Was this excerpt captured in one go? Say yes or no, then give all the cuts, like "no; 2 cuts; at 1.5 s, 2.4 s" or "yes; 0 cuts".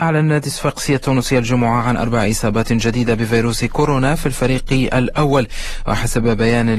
yes; 0 cuts